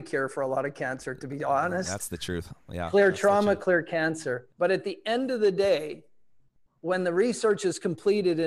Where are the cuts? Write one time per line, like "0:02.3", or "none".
0:04.5